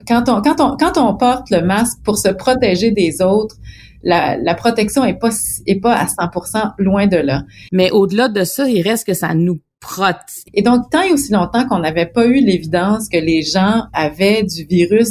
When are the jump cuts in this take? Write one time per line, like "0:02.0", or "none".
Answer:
0:07.7
0:10.5
0:13.9